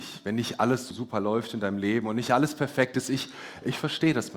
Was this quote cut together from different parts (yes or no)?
yes